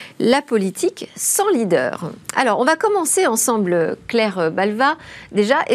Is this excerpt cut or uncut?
uncut